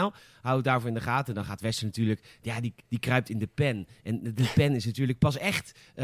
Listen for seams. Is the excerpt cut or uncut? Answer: uncut